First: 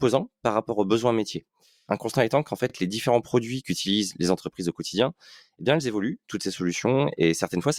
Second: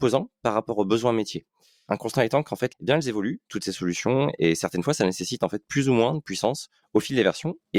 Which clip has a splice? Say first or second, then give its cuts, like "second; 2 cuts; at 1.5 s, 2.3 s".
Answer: second; 1 cut; at 2.7 s